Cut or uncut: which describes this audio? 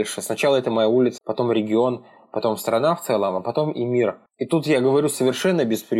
cut